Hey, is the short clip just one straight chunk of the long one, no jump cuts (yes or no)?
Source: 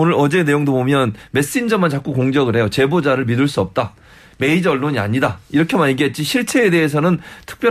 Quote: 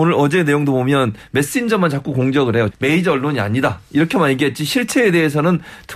no